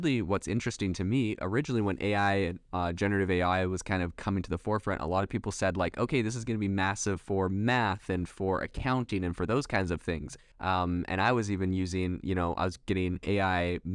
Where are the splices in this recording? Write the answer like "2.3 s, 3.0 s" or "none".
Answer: 10.5 s